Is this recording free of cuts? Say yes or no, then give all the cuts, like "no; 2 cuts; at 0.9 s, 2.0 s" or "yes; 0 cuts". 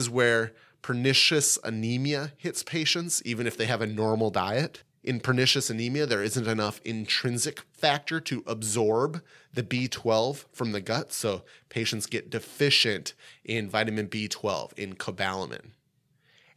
yes; 0 cuts